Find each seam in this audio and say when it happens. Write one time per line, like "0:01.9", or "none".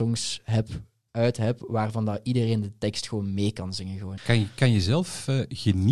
0:04.2